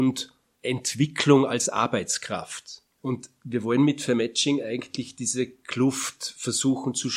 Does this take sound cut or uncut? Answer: uncut